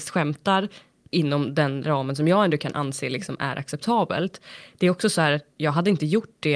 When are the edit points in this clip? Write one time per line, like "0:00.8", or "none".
none